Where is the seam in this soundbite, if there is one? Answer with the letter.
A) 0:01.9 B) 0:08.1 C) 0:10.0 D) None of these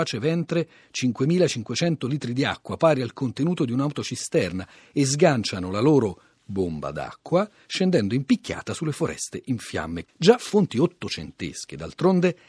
C